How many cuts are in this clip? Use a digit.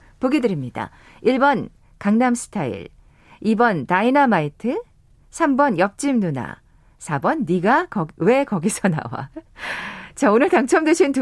0